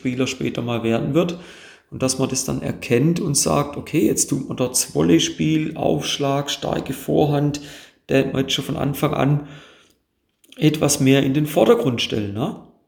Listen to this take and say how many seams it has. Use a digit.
0